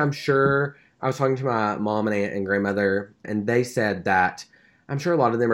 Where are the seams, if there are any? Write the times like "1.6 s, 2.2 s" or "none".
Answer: 3.2 s